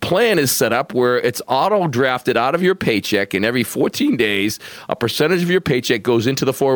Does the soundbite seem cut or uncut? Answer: uncut